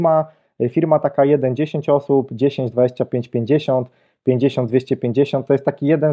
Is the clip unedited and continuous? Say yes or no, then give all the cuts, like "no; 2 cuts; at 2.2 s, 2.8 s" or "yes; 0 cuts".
no; 1 cut; at 2.7 s